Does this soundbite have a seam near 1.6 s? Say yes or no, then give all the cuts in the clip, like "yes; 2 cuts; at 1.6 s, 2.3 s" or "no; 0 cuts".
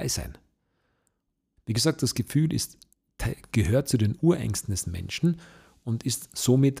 yes; 1 cut; at 1.6 s